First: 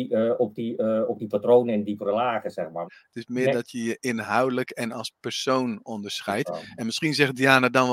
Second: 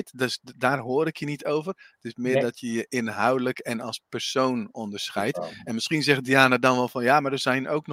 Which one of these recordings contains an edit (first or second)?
first